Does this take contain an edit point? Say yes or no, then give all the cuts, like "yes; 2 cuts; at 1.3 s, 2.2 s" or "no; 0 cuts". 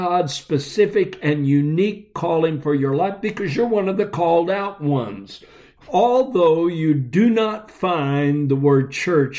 yes; 1 cut; at 5.8 s